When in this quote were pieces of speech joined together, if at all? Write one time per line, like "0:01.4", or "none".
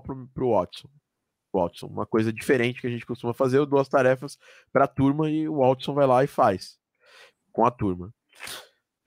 none